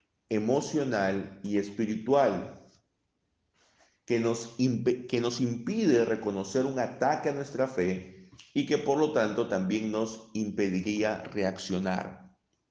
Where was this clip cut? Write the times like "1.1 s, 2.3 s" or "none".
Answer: none